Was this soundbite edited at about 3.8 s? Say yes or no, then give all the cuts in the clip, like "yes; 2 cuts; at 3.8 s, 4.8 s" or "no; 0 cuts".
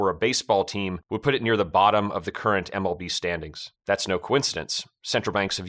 yes; 1 cut; at 3.8 s